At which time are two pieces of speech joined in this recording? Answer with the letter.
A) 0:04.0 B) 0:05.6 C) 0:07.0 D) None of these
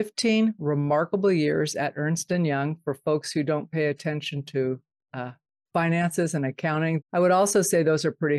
C